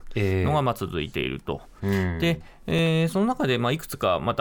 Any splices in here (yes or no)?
yes